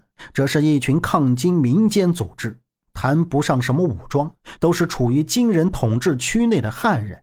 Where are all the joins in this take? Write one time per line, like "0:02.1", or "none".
0:04.6

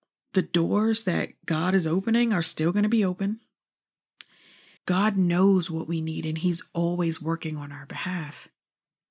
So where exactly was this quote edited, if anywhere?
0:04.8

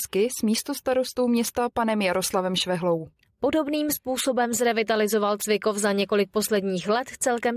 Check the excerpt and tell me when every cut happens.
none

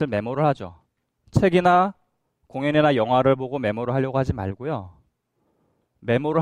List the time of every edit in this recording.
0:01.1

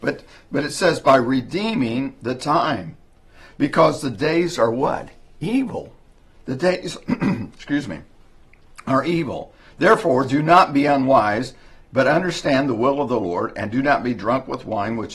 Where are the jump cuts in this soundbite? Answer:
none

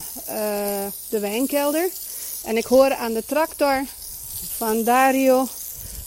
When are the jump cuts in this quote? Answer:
0:02.4

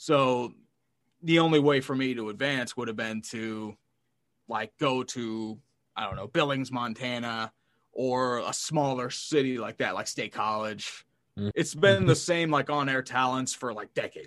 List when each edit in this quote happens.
0:11.5

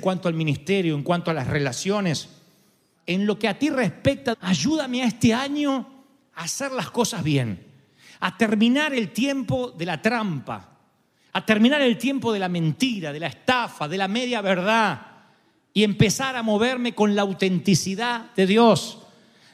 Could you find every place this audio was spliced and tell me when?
0:04.3

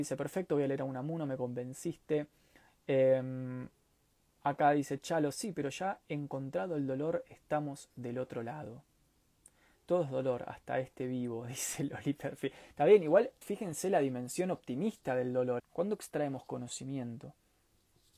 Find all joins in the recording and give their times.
0:13.4
0:15.6

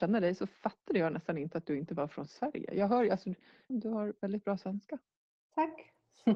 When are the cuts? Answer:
0:03.7

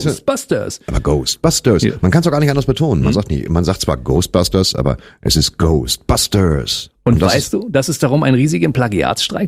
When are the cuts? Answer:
none

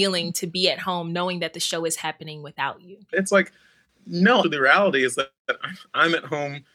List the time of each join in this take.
0:03.1
0:04.4

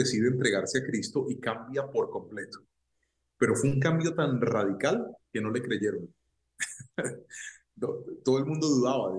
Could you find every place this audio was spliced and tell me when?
none

